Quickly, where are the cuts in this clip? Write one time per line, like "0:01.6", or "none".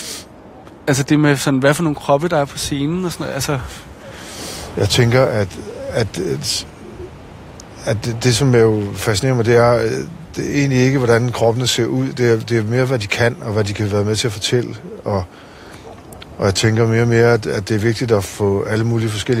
none